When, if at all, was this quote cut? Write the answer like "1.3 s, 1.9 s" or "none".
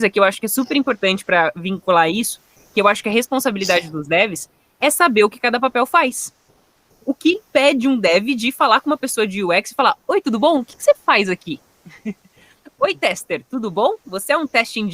none